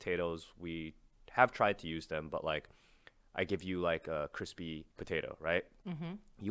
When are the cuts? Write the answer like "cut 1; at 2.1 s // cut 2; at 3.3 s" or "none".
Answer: cut 1; at 4.9 s